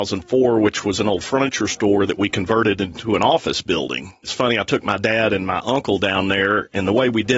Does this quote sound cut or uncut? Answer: cut